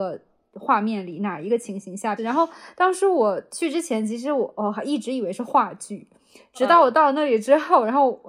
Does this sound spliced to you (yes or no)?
yes